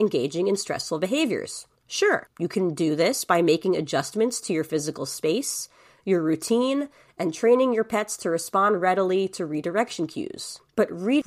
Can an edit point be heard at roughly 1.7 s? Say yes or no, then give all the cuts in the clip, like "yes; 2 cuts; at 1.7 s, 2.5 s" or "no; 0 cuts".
no; 0 cuts